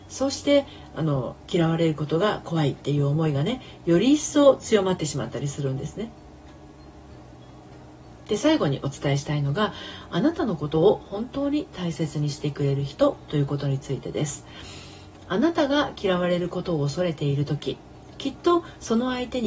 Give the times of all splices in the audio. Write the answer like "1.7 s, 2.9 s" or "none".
none